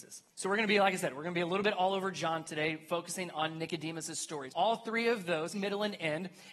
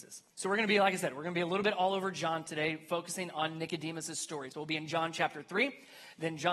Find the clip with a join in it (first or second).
first